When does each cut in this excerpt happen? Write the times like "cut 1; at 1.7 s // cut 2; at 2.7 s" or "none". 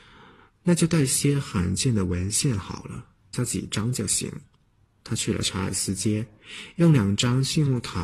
cut 1; at 3.3 s